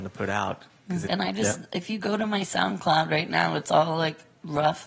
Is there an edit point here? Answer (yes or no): yes